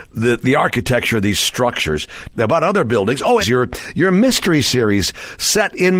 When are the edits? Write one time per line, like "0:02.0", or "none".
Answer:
0:02.3
0:03.4